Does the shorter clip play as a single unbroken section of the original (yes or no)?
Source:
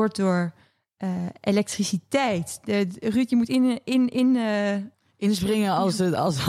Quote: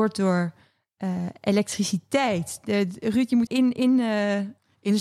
no